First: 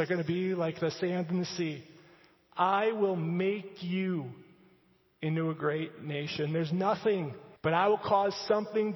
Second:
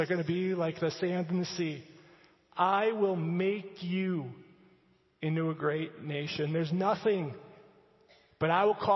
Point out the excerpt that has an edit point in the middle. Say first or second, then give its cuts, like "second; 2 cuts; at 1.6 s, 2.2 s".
first; 1 cut; at 7.6 s